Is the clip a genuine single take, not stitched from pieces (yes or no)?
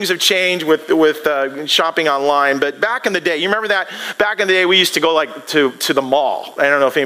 yes